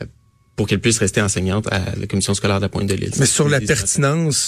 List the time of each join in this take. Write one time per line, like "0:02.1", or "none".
none